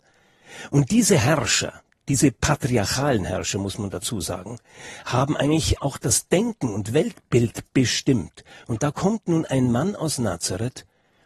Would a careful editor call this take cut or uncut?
uncut